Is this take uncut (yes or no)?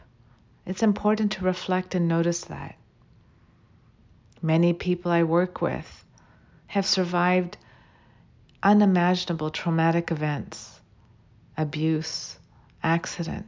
yes